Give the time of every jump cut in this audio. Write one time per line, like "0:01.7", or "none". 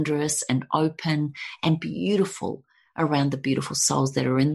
none

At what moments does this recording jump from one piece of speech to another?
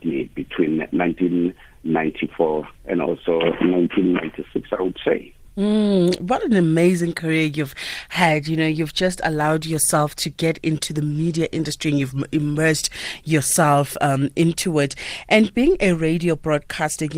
none

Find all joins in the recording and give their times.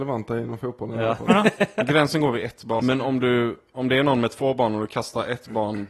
0:02.8

